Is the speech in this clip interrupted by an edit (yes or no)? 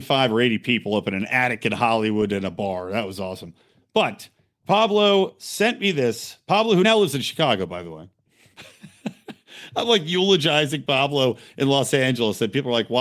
no